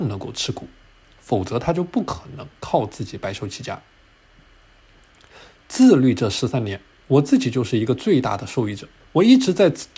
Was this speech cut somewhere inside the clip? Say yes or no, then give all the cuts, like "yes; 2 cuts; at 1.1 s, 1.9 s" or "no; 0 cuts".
yes; 1 cut; at 9.0 s